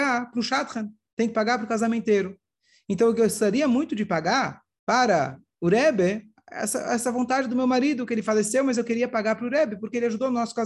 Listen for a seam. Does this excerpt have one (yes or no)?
no